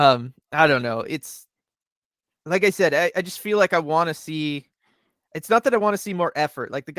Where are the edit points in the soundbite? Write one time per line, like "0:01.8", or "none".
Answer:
none